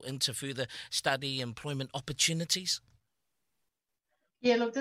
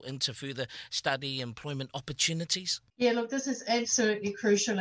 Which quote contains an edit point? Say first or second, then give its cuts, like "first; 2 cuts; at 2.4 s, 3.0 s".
second; 1 cut; at 2.9 s